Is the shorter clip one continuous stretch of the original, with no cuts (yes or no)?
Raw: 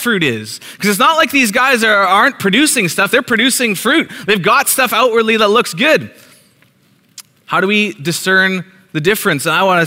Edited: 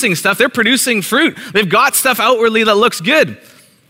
yes